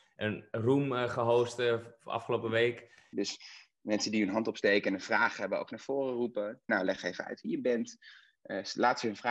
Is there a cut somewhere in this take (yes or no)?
yes